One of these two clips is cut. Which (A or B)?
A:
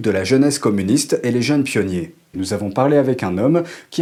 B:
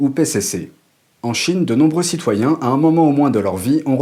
A